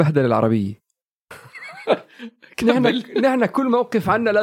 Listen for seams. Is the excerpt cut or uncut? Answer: cut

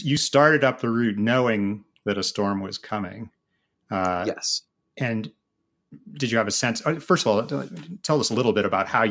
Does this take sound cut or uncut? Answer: uncut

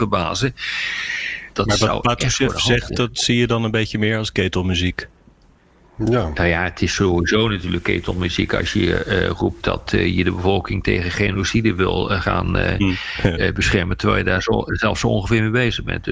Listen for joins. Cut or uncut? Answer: cut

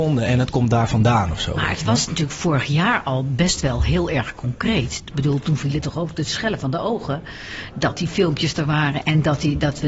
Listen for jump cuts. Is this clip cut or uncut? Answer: uncut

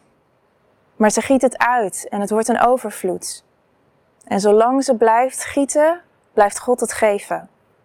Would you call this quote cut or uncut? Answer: uncut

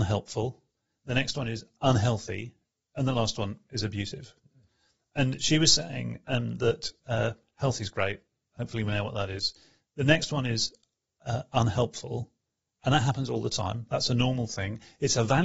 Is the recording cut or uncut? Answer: uncut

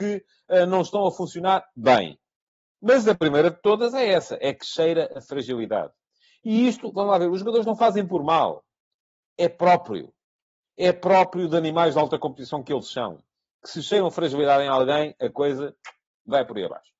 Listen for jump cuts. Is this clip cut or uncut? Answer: uncut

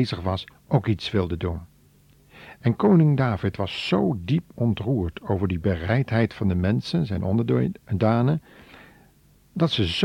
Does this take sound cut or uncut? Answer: uncut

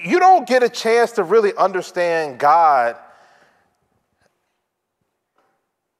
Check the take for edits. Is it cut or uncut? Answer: uncut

